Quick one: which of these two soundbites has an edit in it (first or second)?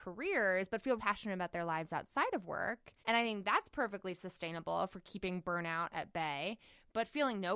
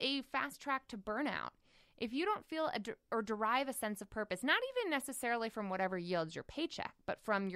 first